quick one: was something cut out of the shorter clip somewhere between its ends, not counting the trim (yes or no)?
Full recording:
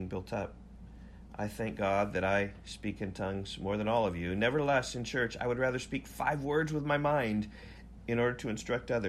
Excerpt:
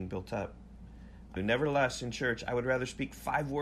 yes